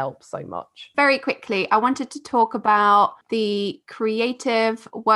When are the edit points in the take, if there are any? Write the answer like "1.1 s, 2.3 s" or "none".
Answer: 0.9 s, 3.2 s